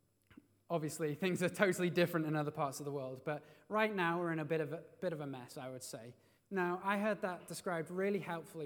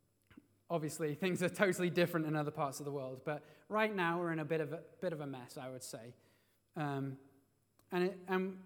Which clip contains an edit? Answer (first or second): first